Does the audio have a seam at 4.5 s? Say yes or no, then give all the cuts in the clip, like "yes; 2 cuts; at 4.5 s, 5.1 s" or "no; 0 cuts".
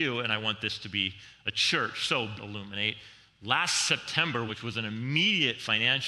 yes; 2 cuts; at 2.4 s, 4.5 s